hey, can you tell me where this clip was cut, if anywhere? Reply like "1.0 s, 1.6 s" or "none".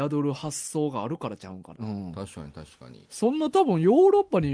1.7 s